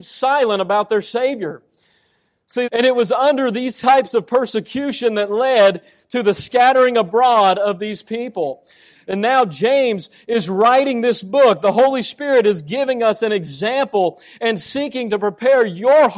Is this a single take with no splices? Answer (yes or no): no